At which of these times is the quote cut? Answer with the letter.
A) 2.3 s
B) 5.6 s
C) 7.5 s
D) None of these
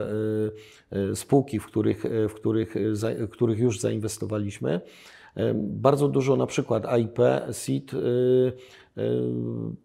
D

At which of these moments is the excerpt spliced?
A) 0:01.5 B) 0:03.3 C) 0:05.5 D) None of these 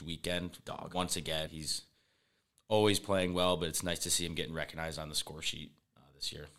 A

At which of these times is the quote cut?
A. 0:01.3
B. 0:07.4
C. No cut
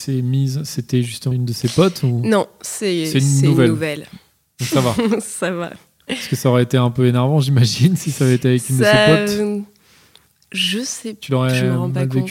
A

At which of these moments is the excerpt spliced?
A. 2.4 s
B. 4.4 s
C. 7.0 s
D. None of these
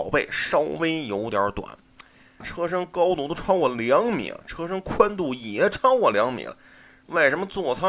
A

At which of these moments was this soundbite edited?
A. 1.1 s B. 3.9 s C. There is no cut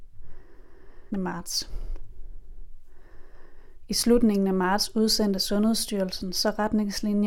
A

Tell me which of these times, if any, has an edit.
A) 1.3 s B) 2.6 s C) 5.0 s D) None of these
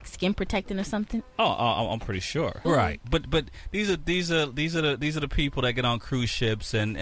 B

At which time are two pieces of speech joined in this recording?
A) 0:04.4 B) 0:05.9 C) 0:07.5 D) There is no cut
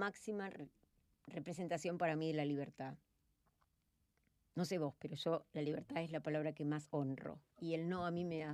C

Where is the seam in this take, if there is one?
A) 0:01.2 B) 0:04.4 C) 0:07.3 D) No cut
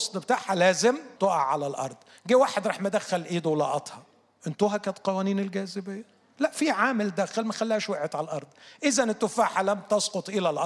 A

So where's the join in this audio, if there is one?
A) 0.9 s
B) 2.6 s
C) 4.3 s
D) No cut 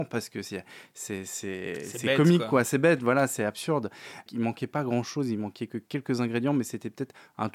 C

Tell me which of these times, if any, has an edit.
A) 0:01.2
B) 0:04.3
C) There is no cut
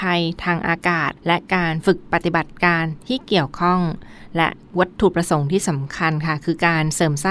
A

